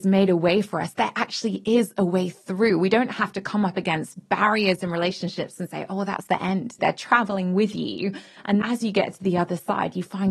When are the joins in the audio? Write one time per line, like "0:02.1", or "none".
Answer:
0:06.8
0:08.6